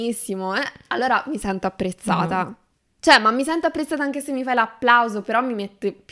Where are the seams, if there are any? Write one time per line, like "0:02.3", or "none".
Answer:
none